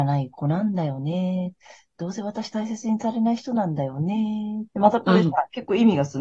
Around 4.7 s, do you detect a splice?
yes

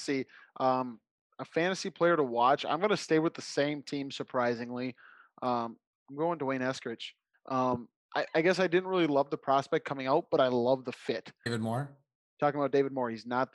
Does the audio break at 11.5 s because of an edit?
yes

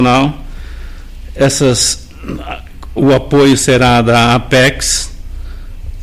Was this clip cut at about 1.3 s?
no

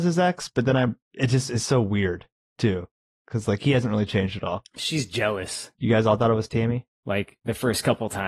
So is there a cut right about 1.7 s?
no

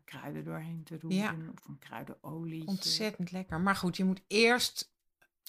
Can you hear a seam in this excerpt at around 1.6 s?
yes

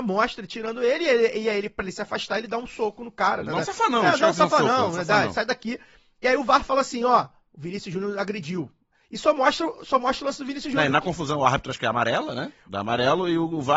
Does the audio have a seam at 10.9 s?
no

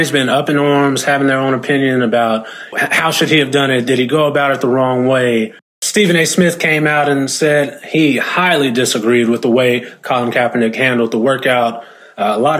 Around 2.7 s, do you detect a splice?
yes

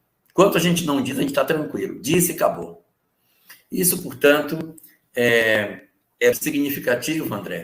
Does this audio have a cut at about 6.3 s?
yes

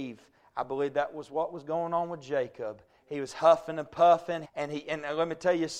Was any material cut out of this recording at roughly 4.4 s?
yes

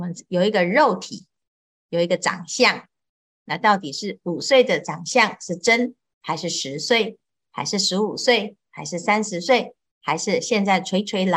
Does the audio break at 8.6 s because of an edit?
no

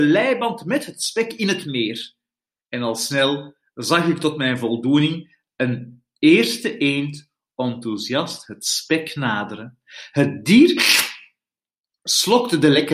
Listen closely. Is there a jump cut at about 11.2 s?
no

